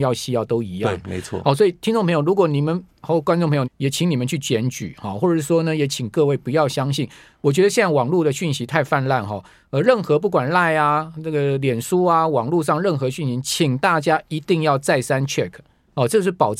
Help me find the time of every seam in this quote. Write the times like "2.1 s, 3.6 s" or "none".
3.6 s